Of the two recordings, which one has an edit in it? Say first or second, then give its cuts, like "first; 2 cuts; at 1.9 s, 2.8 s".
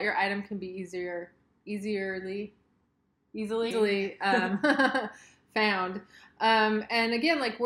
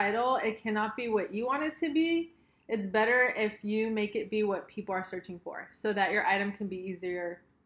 first; 1 cut; at 3.7 s